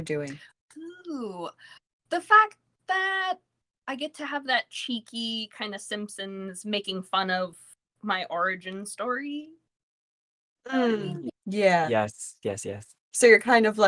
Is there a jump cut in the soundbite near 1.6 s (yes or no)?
no